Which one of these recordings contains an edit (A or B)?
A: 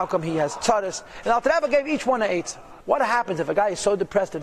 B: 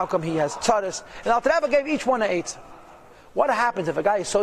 A